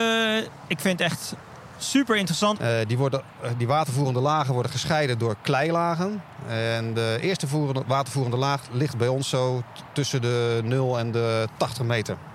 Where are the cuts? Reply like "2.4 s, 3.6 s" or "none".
2.6 s